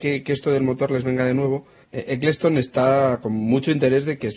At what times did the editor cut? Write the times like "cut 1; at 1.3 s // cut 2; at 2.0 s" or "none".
cut 1; at 1.8 s